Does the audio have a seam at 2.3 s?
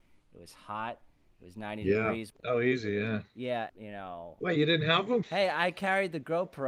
yes; 3 cuts; at 2.3 s, 3.7 s, 5.2 s

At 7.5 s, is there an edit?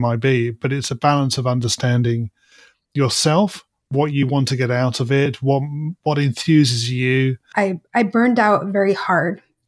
yes; 1 cut; at 7.5 s

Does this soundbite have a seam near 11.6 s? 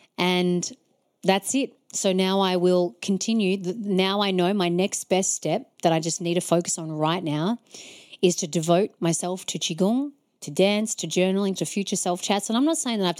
yes; 1 cut; at 11.6 s

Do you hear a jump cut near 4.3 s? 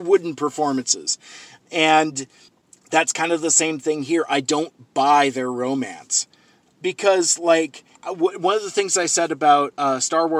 no; 2 cuts; at 6.7 s, 8.0 s

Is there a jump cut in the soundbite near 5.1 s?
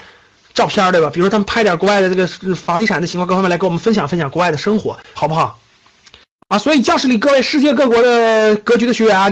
yes; 1 cut; at 5.1 s

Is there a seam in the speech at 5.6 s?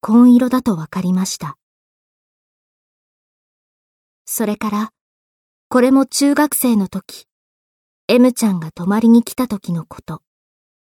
no; 0 cuts

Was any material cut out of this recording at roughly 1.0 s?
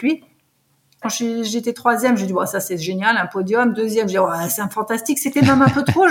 yes; 1 cut; at 1.0 s

